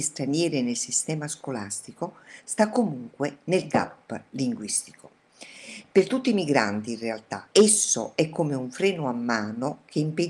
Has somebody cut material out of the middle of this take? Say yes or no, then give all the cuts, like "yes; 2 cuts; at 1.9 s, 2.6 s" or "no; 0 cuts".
yes; 1 cut; at 7.5 s